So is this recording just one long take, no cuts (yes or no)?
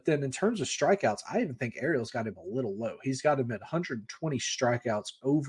yes